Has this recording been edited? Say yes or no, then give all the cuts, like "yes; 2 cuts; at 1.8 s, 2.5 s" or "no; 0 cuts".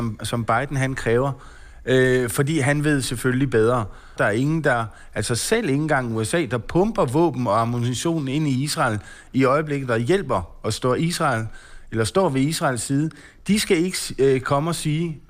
yes; 1 cut; at 4.2 s